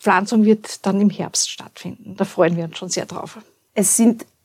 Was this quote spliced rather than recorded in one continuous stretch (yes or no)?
no